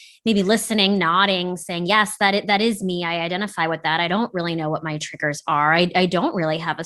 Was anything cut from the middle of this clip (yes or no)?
no